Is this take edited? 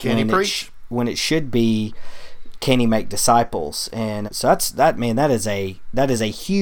yes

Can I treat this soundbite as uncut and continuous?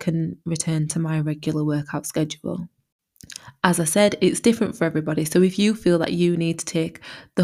yes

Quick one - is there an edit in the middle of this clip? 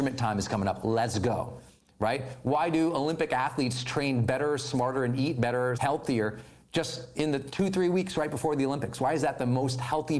yes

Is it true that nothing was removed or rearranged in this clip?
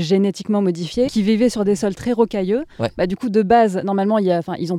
no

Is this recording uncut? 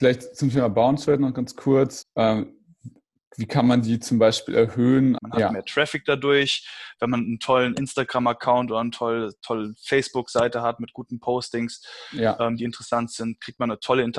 no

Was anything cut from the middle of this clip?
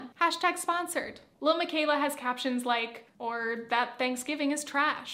yes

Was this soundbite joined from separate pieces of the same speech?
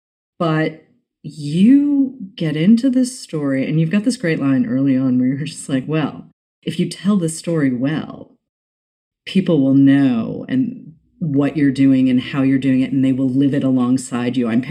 no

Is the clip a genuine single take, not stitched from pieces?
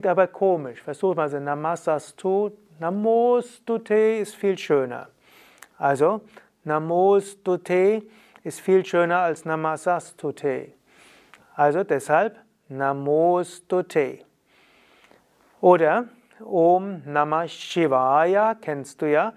yes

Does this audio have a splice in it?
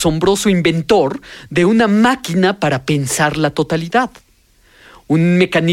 no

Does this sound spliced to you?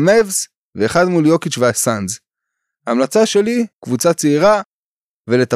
yes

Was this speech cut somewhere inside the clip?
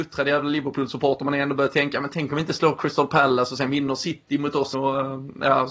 yes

